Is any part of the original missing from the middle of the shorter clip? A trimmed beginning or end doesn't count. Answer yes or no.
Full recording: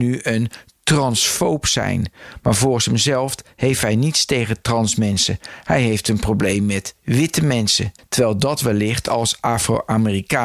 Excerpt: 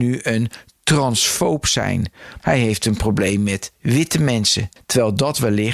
yes